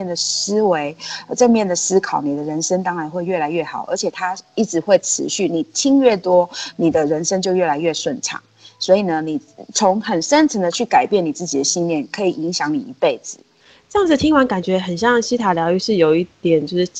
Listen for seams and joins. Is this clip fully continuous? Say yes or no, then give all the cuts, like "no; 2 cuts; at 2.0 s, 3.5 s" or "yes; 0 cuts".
yes; 0 cuts